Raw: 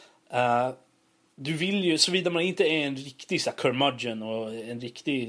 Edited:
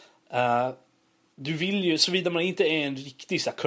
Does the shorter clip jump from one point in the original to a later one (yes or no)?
no